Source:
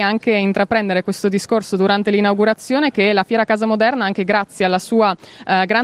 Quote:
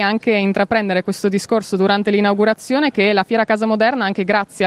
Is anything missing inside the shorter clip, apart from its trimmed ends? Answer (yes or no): no